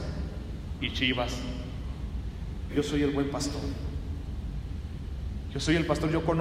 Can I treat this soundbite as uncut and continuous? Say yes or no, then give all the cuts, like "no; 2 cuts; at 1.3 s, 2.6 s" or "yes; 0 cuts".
no; 1 cut; at 2.7 s